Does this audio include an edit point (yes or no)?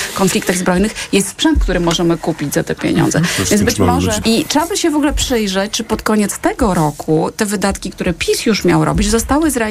yes